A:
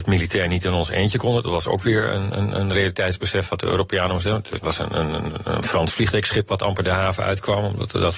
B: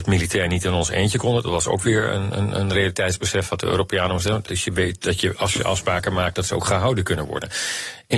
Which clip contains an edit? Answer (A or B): B